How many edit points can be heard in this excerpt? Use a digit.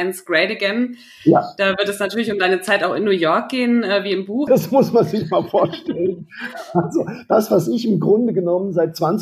1